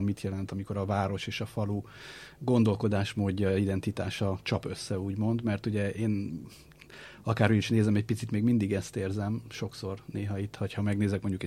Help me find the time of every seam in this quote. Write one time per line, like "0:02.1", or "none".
none